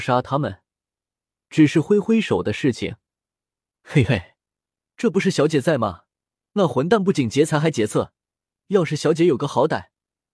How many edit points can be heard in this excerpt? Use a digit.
1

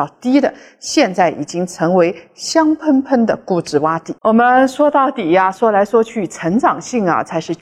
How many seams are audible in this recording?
1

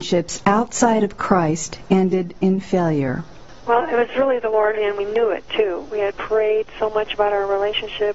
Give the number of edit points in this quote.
1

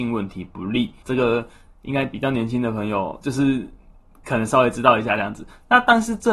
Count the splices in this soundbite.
1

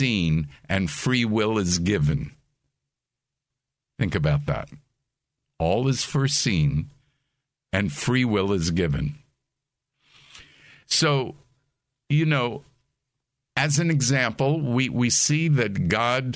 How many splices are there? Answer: 0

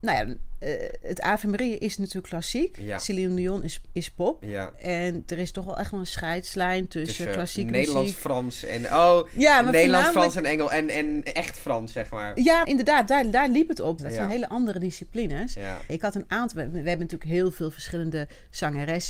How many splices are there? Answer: 3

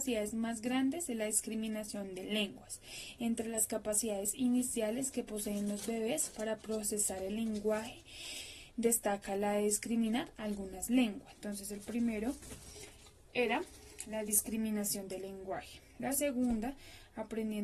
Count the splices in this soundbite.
1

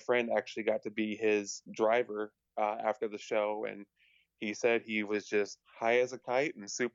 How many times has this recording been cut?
0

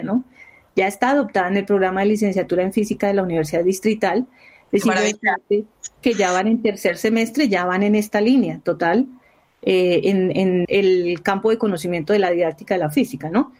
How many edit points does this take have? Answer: 1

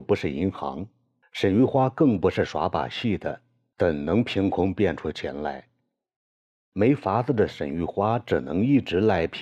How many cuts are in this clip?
0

